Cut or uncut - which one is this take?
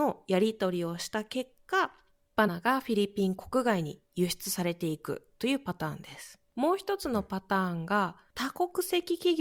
cut